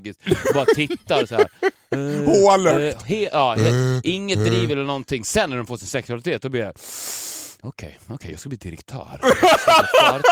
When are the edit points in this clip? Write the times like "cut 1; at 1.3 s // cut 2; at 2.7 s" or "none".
none